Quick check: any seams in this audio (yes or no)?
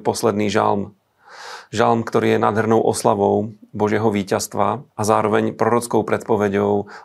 yes